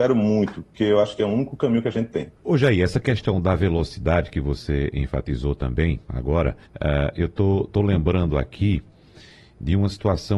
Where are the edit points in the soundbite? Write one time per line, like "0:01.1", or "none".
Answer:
0:02.4
0:06.7